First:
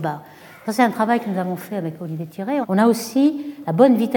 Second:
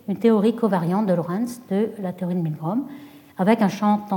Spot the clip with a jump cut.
first; 1 cut; at 2.6 s

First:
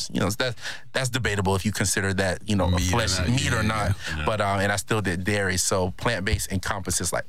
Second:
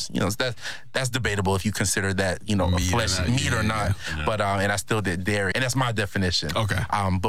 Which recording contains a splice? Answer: second; 1 cut; at 5.5 s

